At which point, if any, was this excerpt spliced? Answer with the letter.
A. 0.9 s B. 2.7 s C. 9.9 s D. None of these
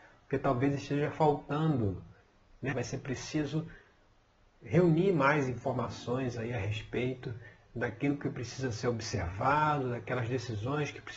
B